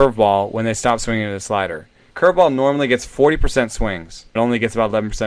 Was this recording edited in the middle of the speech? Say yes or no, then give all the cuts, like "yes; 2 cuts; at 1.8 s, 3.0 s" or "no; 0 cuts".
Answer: yes; 2 cuts; at 2.1 s, 4.4 s